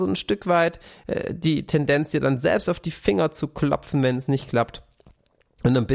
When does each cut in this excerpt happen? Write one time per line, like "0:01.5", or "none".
none